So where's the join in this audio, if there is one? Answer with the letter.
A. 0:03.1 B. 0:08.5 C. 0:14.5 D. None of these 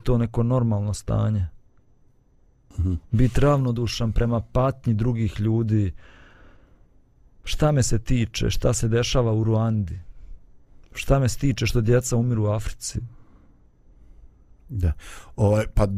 D